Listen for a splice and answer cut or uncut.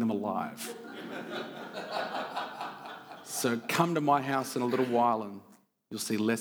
uncut